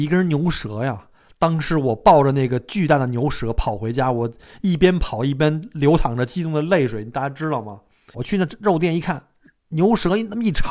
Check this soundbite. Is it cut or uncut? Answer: cut